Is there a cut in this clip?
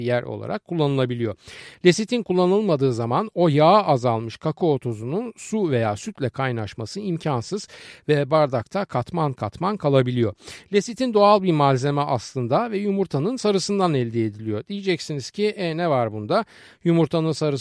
no; 0 cuts

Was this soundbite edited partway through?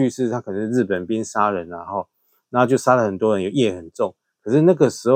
no; 0 cuts

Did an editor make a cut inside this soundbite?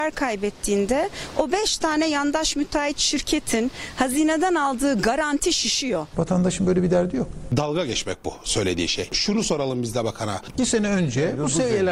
yes; 2 cuts; at 6.1 s, 10.5 s

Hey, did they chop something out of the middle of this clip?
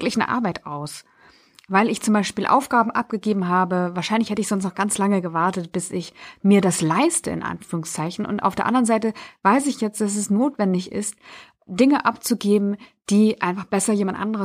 no; 0 cuts

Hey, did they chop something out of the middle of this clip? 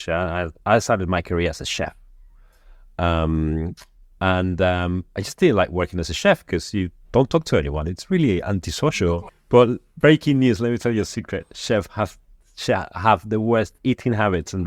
no; 0 cuts

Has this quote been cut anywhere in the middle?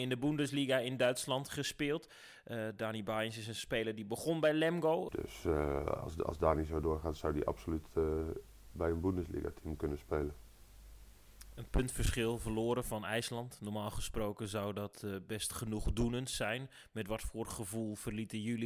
yes; 1 cut; at 5.1 s

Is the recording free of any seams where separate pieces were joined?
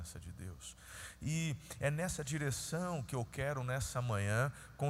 yes; 0 cuts

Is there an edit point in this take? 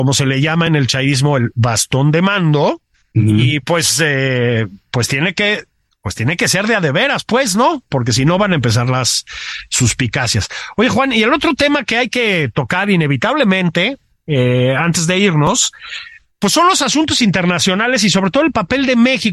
no; 0 cuts

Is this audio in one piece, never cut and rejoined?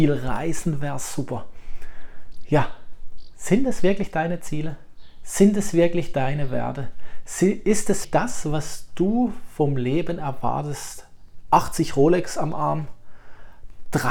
no; 1 cut; at 8.0 s

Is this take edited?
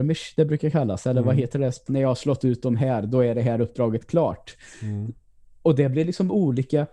yes; 1 cut; at 1.9 s

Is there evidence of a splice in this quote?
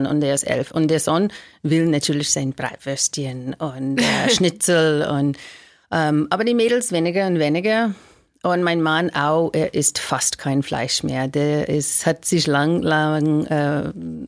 no; 0 cuts

